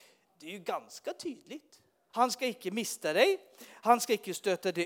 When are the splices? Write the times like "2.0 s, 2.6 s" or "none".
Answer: 2.1 s